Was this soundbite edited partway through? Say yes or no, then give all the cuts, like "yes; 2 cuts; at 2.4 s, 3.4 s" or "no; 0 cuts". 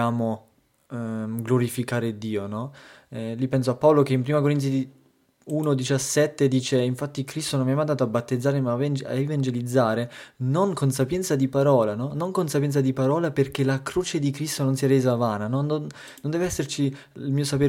yes; 1 cut; at 12.1 s